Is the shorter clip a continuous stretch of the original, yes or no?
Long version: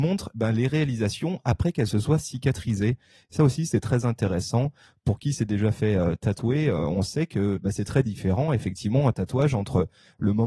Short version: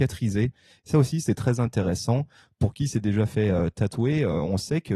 yes